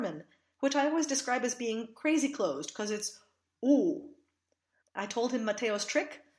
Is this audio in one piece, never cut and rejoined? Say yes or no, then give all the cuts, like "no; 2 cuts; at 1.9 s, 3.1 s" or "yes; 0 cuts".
no; 1 cut; at 4.8 s